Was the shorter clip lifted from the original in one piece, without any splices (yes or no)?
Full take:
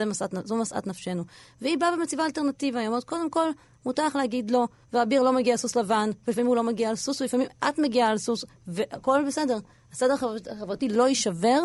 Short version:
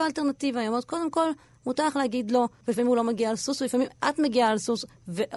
no